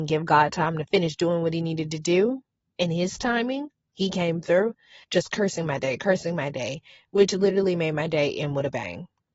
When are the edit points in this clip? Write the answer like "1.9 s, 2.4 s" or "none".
5.0 s